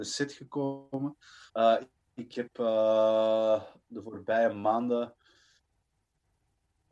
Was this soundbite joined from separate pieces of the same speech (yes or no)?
yes